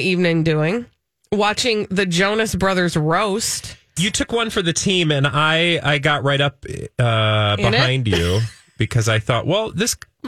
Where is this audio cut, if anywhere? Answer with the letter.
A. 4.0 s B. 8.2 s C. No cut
A